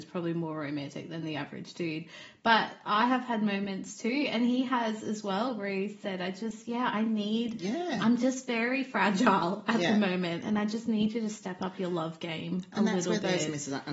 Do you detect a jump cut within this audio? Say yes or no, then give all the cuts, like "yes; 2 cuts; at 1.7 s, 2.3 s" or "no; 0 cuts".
no; 0 cuts